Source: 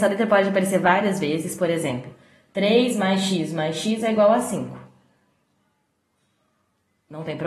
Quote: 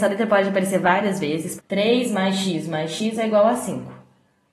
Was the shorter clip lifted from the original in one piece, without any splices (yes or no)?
no